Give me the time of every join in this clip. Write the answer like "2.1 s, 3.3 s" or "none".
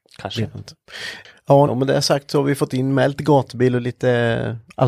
1.7 s